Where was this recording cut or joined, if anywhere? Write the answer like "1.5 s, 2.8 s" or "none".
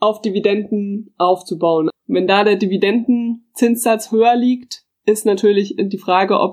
1.9 s